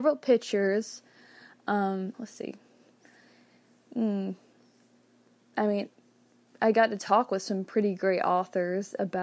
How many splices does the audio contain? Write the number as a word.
one